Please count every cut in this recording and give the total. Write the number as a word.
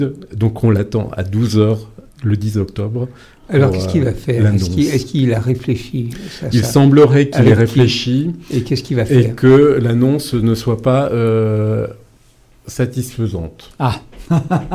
zero